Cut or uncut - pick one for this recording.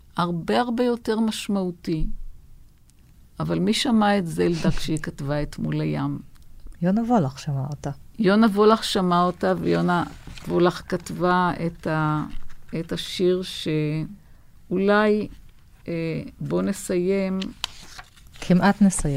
uncut